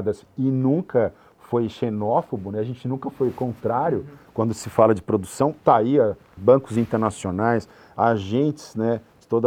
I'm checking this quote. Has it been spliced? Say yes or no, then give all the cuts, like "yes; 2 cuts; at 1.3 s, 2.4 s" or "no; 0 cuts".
yes; 1 cut; at 6.4 s